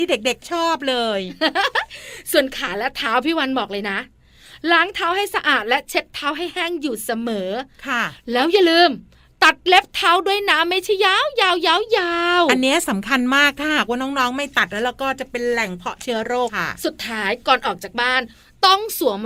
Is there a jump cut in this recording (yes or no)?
yes